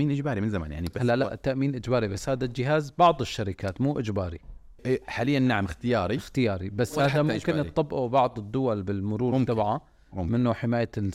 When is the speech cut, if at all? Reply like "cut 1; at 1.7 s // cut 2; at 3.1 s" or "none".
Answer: cut 1; at 4.8 s